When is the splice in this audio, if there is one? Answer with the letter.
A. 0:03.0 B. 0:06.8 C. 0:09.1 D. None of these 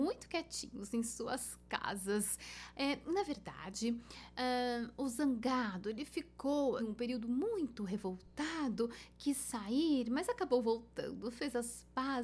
B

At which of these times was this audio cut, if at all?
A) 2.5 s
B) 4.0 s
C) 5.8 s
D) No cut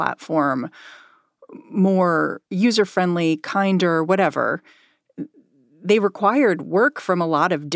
A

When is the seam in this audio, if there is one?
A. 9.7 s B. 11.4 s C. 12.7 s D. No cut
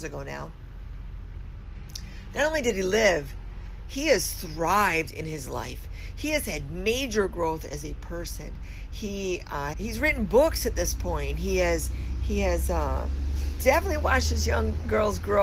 A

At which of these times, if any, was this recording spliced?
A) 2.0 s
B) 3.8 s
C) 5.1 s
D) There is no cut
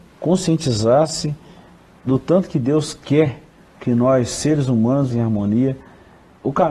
C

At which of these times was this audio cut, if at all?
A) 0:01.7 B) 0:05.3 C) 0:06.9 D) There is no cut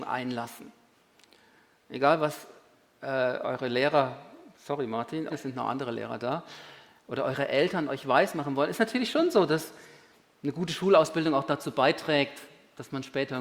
B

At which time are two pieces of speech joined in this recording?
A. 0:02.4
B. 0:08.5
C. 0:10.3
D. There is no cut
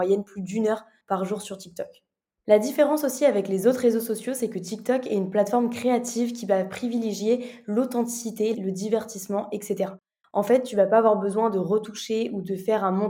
B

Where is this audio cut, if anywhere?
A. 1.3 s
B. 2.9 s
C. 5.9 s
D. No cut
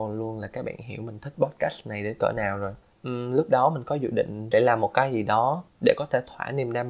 B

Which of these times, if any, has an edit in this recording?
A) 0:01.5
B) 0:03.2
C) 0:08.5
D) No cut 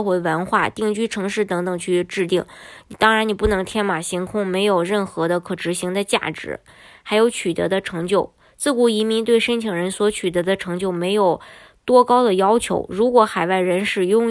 D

